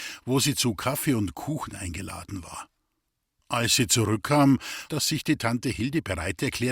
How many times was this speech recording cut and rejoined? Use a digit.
1